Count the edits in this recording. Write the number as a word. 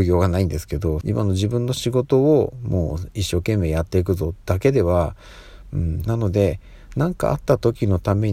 two